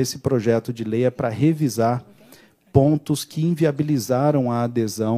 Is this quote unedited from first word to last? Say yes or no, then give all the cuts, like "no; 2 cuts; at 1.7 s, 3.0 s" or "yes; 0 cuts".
yes; 0 cuts